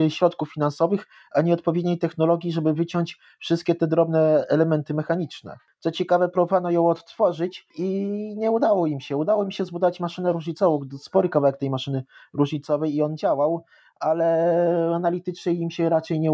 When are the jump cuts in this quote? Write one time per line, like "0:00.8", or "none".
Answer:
none